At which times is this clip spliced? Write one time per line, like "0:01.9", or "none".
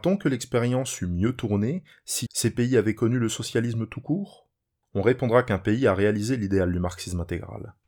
0:02.3